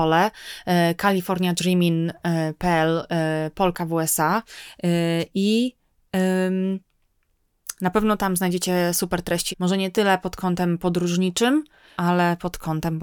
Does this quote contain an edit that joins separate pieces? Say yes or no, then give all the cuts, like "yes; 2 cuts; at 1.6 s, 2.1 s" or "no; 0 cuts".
yes; 2 cuts; at 9.5 s, 12.0 s